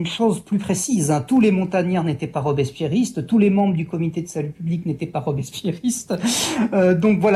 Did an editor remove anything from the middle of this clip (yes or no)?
no